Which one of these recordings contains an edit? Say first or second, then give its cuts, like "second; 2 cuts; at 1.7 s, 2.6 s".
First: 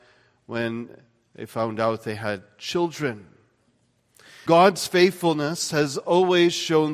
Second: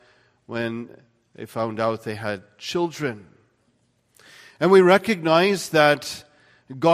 first; 1 cut; at 4.5 s